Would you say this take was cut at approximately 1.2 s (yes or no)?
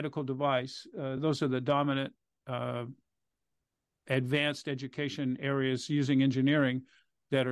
no